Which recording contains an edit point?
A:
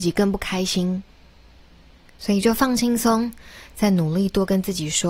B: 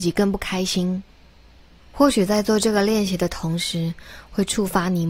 B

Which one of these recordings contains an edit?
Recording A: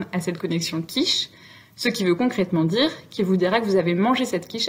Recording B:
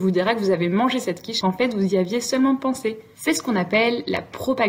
B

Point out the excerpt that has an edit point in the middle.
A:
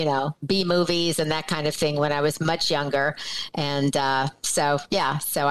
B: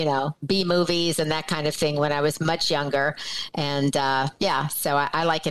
B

